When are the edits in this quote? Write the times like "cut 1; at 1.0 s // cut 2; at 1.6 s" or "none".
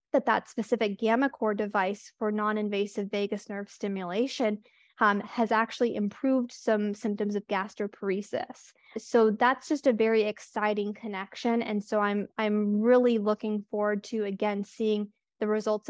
none